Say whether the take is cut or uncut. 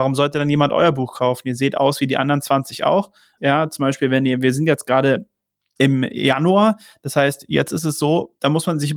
cut